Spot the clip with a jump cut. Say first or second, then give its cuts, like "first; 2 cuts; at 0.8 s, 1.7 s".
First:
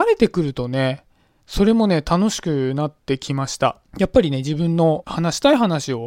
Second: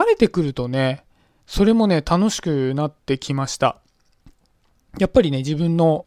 first; 1 cut; at 3.9 s